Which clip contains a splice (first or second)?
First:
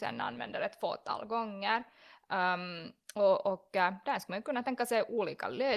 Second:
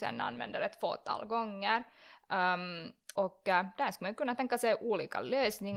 second